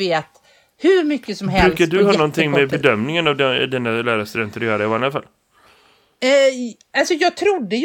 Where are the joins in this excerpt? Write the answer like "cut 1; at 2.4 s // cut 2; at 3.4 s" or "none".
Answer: none